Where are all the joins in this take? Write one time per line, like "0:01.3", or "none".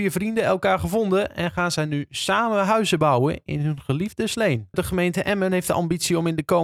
0:04.7